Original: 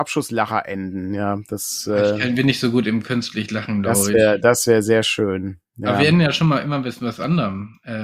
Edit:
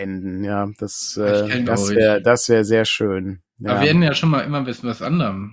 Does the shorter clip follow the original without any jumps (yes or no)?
no